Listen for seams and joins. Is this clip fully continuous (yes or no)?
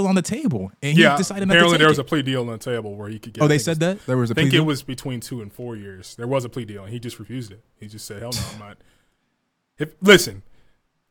yes